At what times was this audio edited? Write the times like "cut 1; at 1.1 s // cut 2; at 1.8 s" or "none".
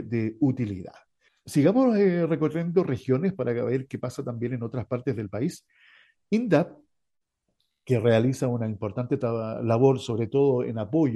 cut 1; at 1.3 s

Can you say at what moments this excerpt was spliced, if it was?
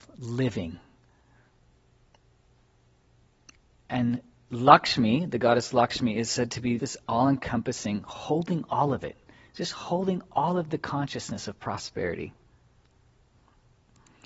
cut 1; at 6.8 s

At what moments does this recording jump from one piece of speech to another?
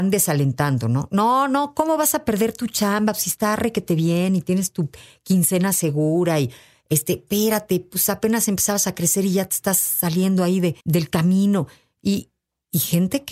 cut 1; at 10.8 s

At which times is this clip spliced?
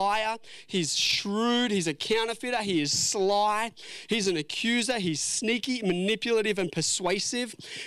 none

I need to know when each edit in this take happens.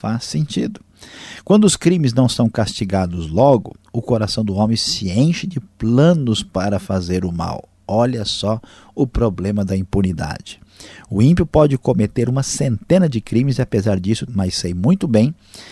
cut 1; at 14.3 s

